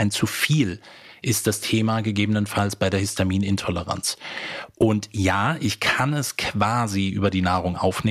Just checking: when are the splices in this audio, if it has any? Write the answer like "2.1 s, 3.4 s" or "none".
none